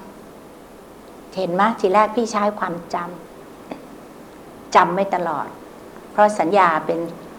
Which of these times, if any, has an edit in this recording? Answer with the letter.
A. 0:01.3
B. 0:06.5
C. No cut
B